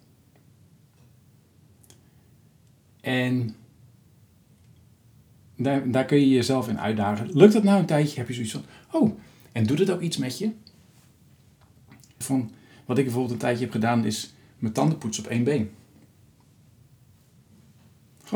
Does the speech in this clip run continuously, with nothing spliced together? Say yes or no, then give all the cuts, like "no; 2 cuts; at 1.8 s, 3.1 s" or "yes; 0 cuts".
no; 1 cut; at 12.2 s